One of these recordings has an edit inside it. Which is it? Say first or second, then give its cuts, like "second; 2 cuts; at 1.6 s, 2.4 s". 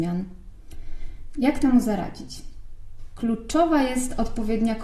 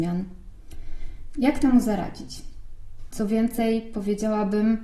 second; 1 cut; at 3.1 s